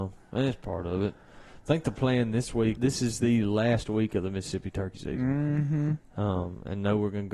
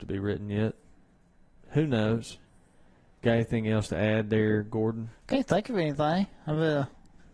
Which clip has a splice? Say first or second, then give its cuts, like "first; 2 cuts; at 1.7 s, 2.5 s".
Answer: first; 1 cut; at 2.8 s